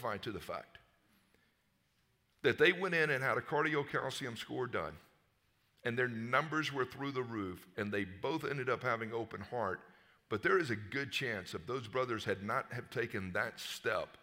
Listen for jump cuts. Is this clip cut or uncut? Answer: uncut